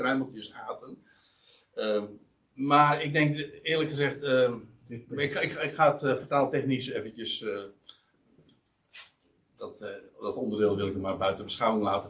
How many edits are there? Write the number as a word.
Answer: zero